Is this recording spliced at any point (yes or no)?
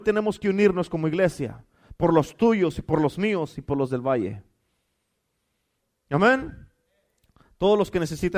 no